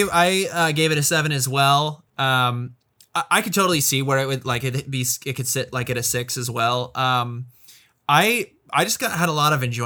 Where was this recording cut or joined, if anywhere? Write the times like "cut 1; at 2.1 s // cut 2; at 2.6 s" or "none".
cut 1; at 2.1 s